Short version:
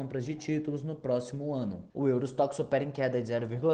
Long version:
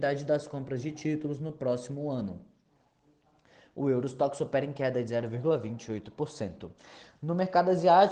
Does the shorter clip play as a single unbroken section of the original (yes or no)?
no